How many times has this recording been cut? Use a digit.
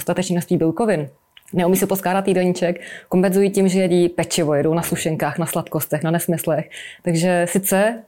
0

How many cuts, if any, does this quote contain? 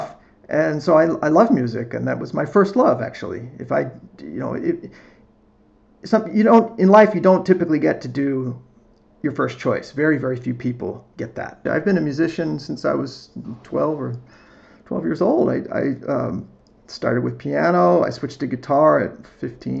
1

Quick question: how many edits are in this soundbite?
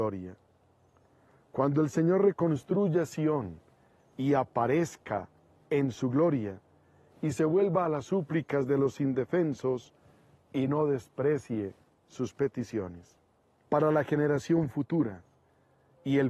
1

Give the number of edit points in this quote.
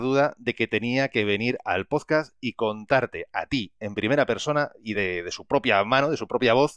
0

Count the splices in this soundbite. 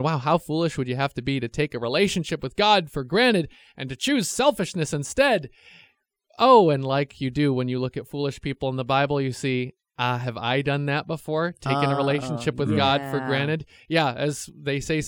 0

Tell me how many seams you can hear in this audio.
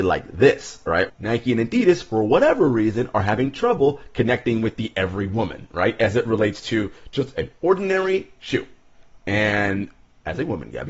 1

